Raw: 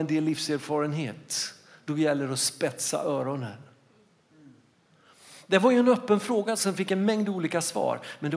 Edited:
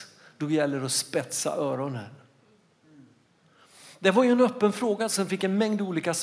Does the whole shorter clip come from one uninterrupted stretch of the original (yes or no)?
yes